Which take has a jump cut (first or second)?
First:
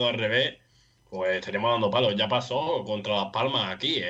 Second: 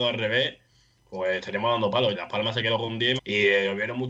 second